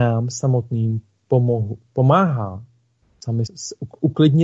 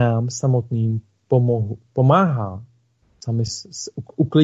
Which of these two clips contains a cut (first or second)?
first